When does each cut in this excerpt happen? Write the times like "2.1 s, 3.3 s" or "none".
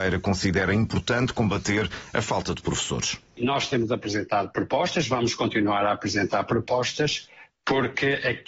3.3 s